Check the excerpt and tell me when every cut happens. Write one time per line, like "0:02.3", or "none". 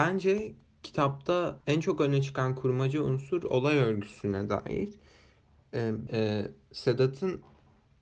0:01.6
0:06.1